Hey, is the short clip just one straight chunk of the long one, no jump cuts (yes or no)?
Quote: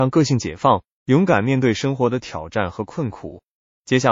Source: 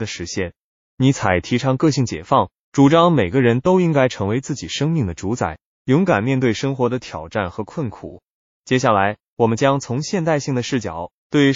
no